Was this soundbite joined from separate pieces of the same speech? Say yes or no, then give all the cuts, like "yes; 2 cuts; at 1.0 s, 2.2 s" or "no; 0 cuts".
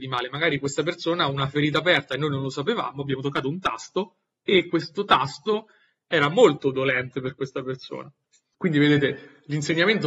no; 0 cuts